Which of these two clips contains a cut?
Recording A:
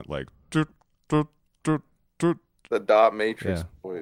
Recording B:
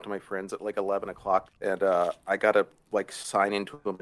B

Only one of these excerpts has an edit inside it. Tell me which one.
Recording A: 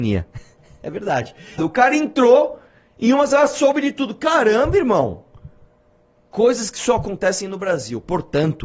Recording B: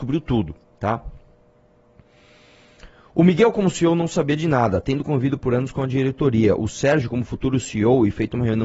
A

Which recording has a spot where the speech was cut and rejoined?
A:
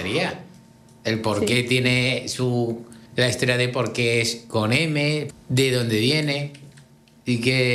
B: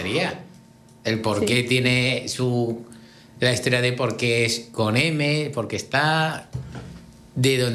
A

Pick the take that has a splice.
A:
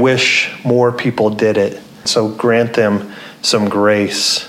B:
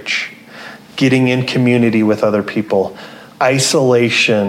A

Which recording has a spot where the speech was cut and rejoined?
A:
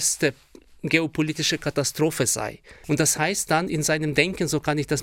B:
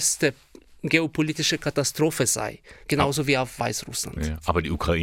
B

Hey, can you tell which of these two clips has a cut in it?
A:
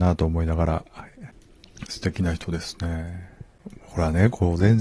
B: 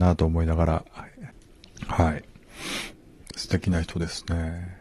A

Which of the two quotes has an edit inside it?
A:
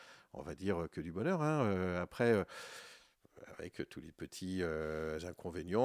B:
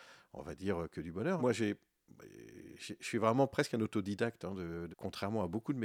B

